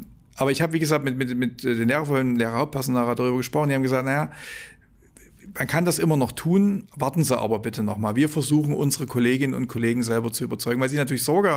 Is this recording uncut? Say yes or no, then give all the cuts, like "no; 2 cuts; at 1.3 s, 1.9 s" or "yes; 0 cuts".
yes; 0 cuts